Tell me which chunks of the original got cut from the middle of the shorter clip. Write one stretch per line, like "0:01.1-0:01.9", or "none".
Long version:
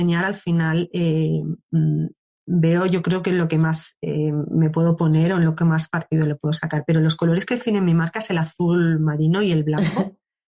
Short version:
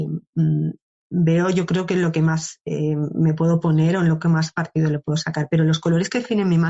none